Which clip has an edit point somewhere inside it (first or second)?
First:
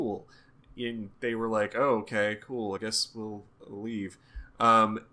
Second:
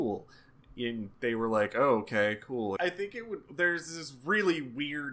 second